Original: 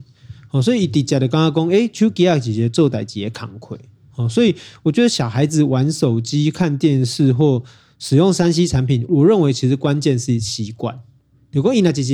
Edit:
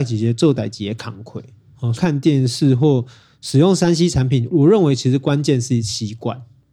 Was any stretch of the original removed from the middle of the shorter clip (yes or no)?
yes